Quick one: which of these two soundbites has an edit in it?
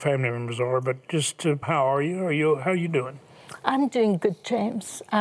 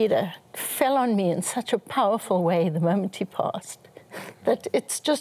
first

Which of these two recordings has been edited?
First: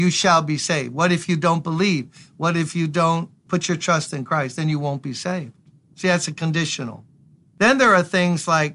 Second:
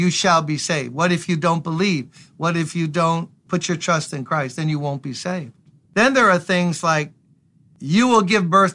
second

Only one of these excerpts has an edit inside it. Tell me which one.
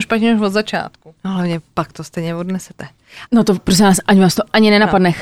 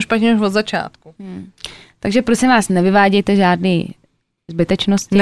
first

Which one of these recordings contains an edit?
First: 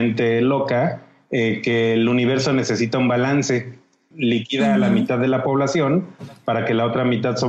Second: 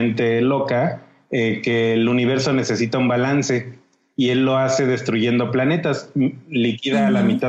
first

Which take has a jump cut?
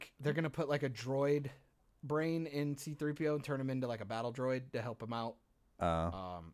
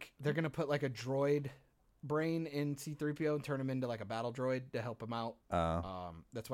second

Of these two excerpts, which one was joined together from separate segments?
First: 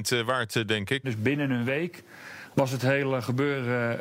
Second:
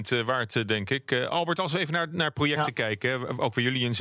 first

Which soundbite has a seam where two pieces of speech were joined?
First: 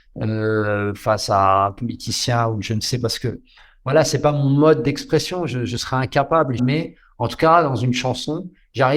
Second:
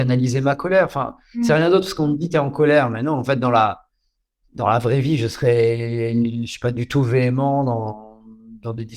first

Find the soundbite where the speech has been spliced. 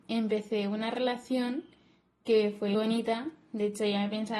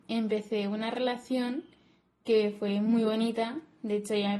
first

